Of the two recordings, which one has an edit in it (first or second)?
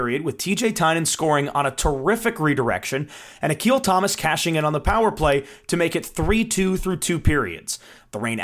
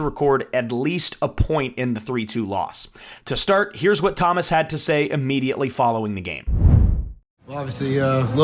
second